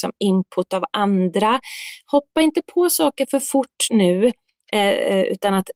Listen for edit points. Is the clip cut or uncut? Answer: uncut